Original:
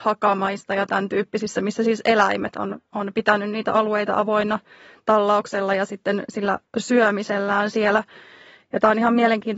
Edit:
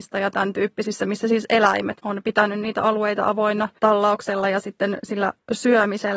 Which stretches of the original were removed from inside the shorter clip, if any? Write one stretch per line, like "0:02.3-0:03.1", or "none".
0:02.5-0:02.9
0:04.7-0:05.0

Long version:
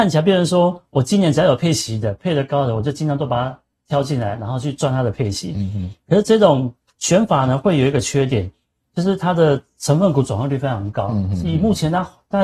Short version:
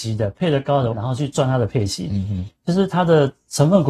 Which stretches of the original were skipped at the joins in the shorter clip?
0:02.8-0:04.4
0:06.0-0:08.9

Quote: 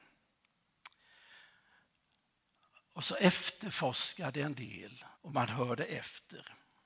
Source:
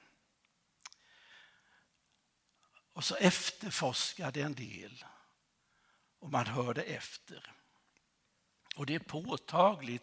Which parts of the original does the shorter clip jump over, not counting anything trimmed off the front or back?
0:05.1-0:06.1

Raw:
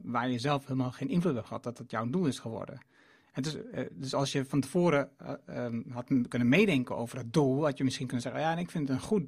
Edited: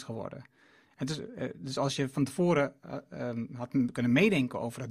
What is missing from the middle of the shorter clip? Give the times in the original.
none

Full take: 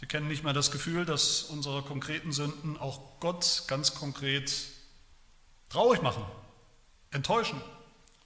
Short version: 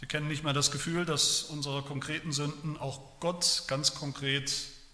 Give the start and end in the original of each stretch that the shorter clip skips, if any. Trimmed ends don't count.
none

